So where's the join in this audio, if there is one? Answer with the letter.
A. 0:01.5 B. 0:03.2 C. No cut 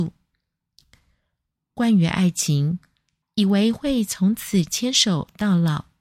B